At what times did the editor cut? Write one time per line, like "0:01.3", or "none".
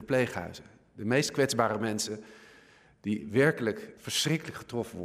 0:04.0